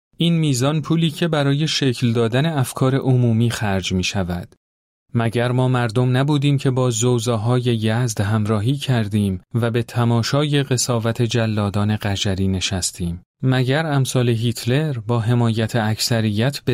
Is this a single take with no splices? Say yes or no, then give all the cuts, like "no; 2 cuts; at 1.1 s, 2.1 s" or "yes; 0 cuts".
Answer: no; 2 cuts; at 4.9 s, 13.3 s